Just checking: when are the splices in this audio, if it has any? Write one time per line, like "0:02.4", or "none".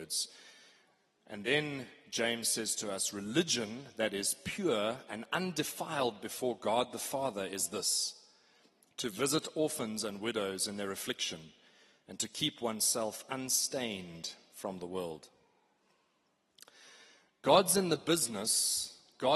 none